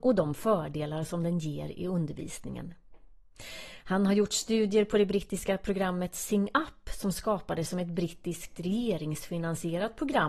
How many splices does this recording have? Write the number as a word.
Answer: zero